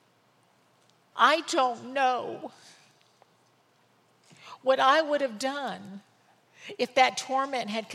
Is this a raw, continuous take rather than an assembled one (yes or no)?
no